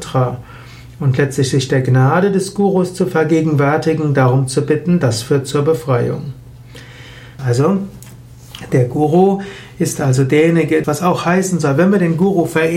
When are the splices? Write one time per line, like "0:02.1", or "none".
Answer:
0:07.4
0:10.8

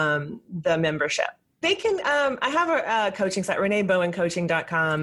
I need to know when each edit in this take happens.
0:01.6

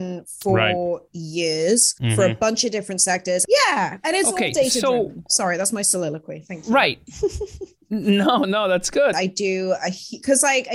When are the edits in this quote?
0:03.4
0:09.1

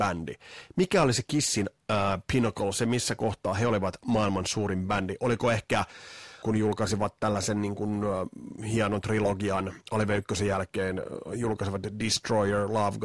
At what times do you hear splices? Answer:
0:06.4

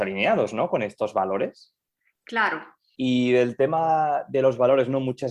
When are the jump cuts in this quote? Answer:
0:02.9

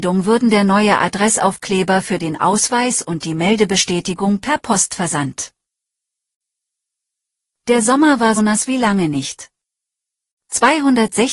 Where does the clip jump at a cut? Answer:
0:08.4

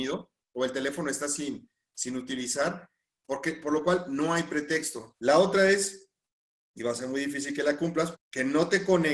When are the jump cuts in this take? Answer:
0:05.1
0:08.1

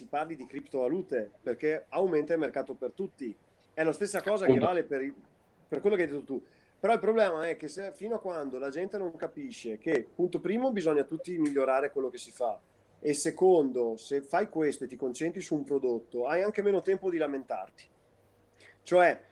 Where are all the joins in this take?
none

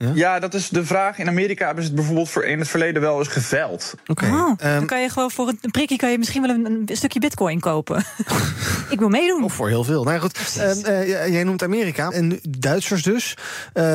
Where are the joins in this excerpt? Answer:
0:04.0
0:12.1

